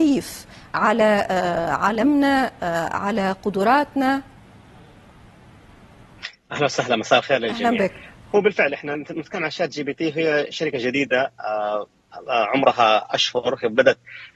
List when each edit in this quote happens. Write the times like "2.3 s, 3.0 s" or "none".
none